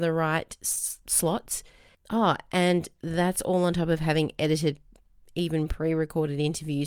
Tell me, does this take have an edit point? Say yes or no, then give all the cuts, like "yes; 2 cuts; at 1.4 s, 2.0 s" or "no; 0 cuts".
no; 0 cuts